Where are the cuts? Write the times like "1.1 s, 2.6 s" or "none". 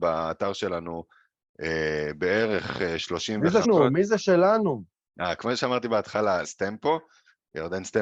3.6 s, 6.4 s